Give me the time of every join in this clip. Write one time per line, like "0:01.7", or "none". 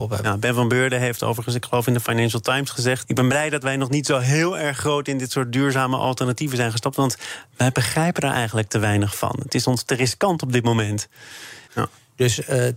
0:03.0
0:11.7

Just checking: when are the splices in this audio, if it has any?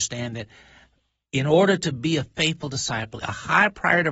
0:03.2

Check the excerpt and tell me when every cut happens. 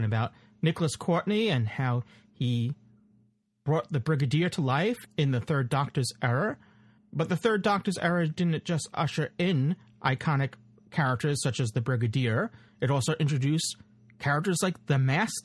none

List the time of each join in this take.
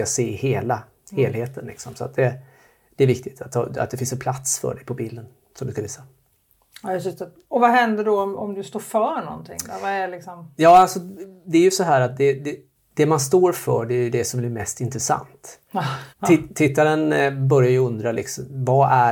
0:16.1

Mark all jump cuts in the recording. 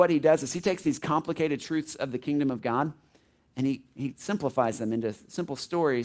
none

